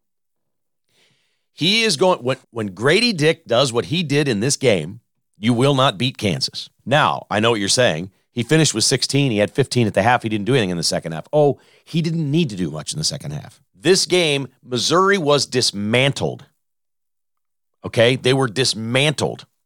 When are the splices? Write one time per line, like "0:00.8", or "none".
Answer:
0:02.4
0:06.8
0:13.7